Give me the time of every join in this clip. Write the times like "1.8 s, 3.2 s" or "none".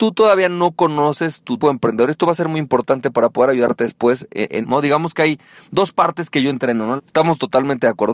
1.6 s, 4.6 s, 7.0 s